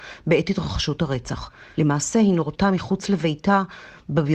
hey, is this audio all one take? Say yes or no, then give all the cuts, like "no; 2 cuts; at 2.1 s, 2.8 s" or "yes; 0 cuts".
yes; 0 cuts